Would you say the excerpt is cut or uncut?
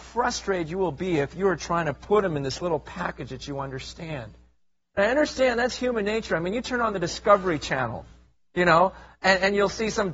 uncut